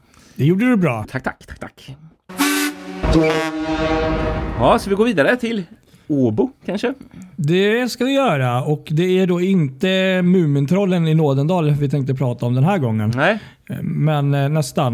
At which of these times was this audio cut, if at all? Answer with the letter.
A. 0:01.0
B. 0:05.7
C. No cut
A